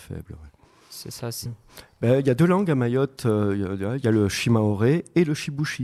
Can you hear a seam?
yes; 1 cut; at 1.5 s

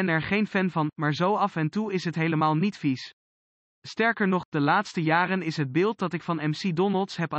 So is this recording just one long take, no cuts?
yes; 0 cuts

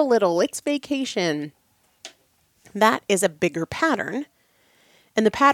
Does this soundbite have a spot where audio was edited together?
no; 0 cuts

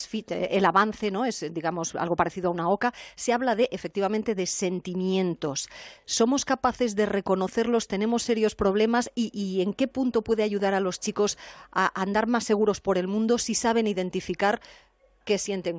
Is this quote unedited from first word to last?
yes; 0 cuts

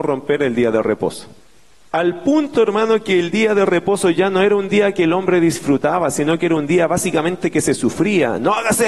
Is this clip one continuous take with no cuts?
no; 1 cut; at 1.9 s

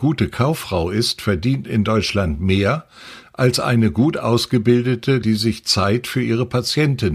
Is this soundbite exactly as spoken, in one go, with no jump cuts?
no; 1 cut; at 5.2 s

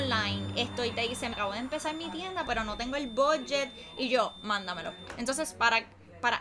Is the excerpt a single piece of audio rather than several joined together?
no; 2 cuts; at 1.3 s, 2.5 s

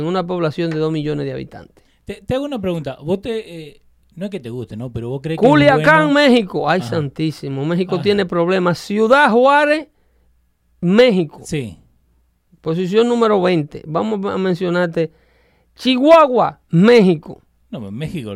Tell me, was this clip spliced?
no; 0 cuts

